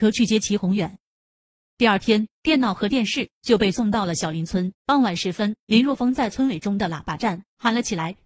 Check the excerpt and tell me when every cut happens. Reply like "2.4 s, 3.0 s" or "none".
1.7 s, 4.7 s